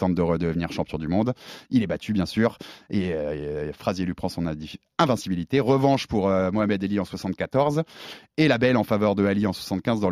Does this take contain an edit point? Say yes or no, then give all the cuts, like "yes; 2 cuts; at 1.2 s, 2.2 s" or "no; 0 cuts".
no; 0 cuts